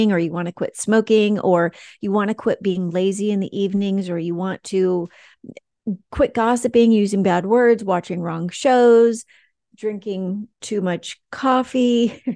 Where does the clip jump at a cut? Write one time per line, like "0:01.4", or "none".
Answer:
none